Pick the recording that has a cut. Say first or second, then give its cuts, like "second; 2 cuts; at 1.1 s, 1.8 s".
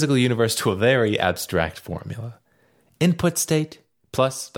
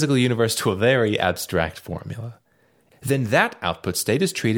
second; 1 cut; at 2.9 s